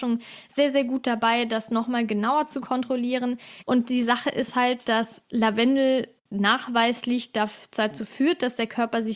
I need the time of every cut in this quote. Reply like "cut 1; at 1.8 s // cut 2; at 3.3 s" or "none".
cut 1; at 3.6 s